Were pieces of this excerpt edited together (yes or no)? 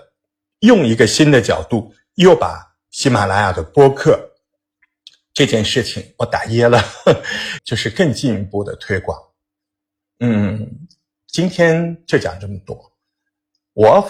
yes